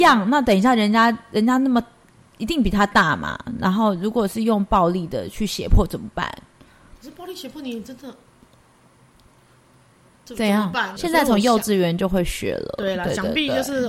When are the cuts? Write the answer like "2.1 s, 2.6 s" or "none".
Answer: 11.0 s

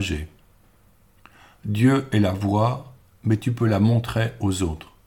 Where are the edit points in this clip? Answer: none

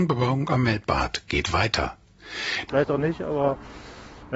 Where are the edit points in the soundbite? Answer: 2.7 s

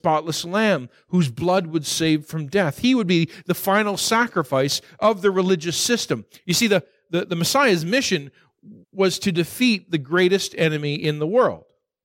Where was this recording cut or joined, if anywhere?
6.4 s, 8.8 s

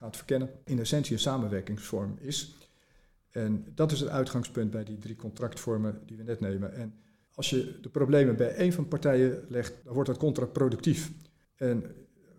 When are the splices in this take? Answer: none

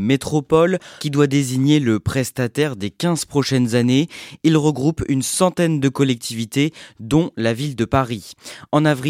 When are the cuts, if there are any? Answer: 1.0 s

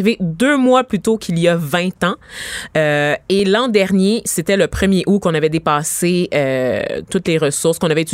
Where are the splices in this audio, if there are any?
none

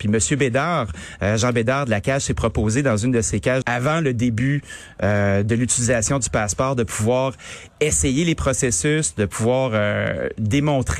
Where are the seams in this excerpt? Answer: 3.6 s

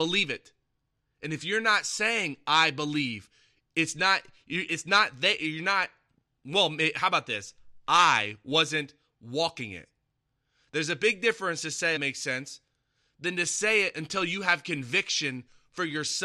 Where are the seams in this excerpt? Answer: 12.0 s

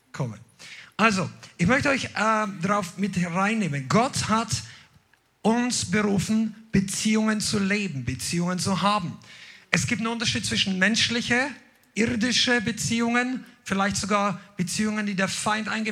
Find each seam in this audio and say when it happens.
none

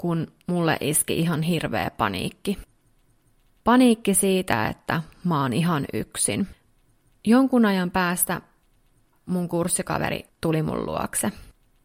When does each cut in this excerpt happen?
7.1 s, 10.3 s

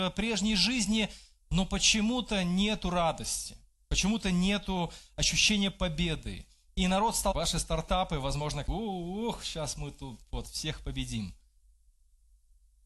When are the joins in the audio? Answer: 8.7 s

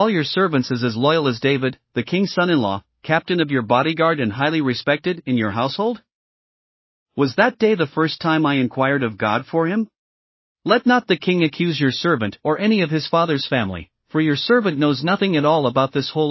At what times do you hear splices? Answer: 10.5 s

